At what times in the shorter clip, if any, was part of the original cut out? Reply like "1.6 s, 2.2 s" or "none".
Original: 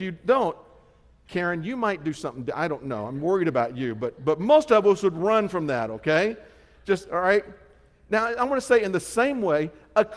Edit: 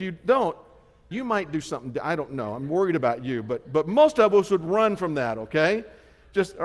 1.1 s